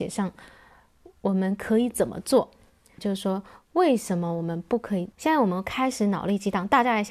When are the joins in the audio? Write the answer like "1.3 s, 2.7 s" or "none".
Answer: 3.0 s, 5.1 s